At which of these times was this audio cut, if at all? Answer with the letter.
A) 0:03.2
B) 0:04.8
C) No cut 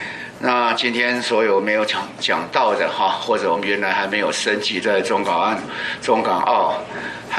B